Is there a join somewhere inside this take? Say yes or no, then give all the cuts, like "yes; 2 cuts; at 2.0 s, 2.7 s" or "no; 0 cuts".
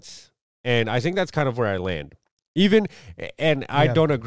no; 0 cuts